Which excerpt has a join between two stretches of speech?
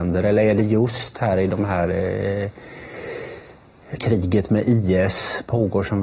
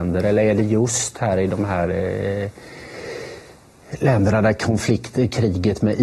first; 1 cut; at 4.0 s

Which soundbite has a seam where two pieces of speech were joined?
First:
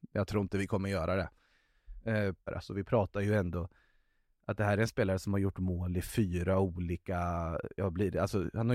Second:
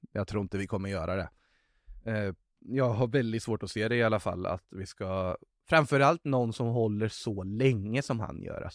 first; 1 cut; at 2.5 s

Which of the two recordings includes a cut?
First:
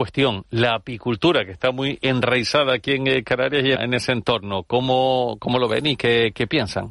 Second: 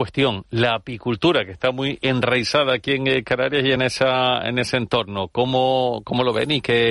first; 1 cut; at 3.8 s

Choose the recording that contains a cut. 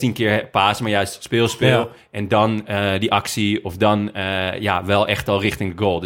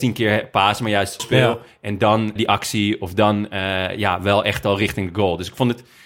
second; 2 cuts; at 1.2 s, 2.4 s

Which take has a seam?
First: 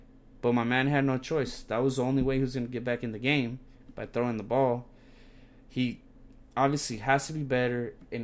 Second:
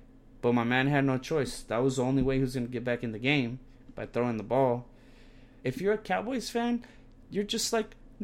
second; 1 cut; at 5.6 s

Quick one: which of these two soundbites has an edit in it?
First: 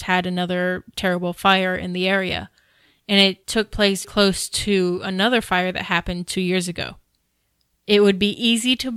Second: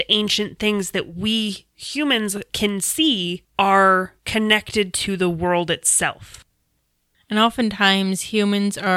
first; 1 cut; at 4.0 s

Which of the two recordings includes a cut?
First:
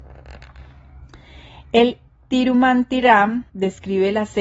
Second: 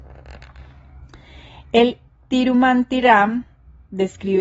first; 1 cut; at 3.5 s

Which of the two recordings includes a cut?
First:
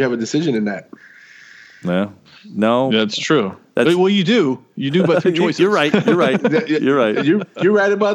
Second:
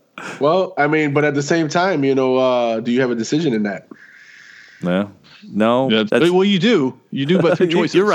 second; 1 cut; at 6.1 s

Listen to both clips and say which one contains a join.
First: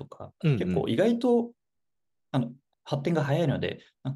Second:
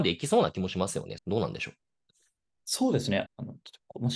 second; 2 cuts; at 1.2 s, 3.3 s

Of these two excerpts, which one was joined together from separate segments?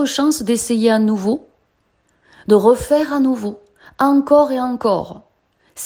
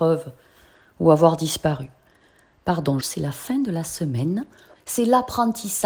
second; 2 cuts; at 3.0 s, 4.7 s

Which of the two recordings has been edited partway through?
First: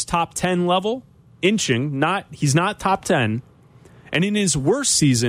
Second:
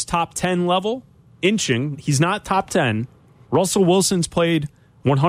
second; 2 cuts; at 1.9 s, 3.4 s

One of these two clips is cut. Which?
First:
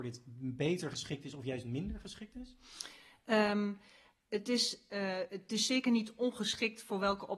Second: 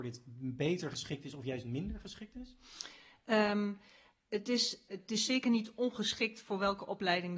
second; 1 cut; at 4.9 s

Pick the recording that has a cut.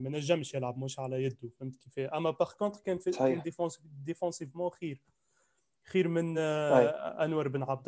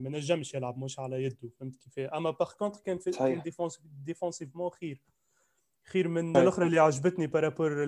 second; 1 cut; at 6.3 s

